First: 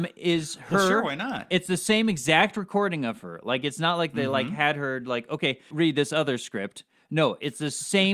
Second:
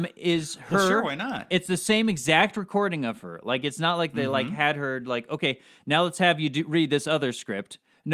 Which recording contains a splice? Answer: first; 1 cut; at 5.7 s

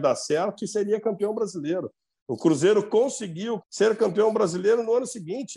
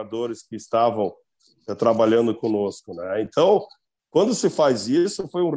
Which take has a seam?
first; 2 cuts; at 2.2 s, 3.6 s

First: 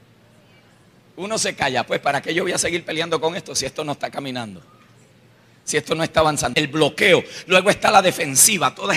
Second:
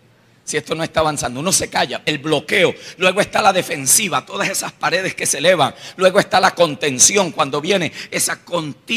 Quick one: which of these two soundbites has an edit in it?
first; 1 cut; at 6.5 s

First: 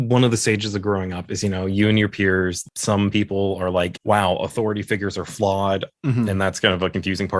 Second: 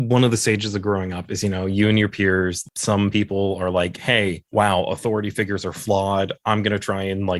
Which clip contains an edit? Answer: first; 2 cuts; at 4.0 s, 5.9 s

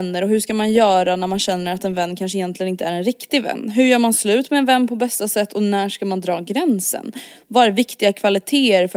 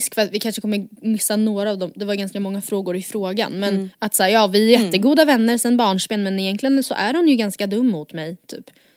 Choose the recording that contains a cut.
second; 1 cut; at 3.9 s

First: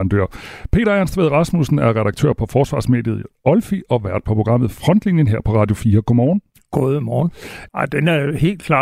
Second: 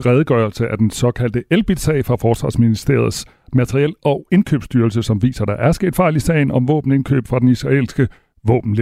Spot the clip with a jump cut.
first; 1 cut; at 7.7 s

